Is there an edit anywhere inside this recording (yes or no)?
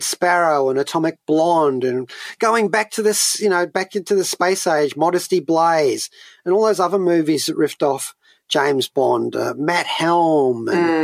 no